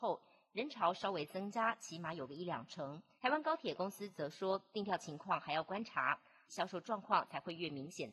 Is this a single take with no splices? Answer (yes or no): no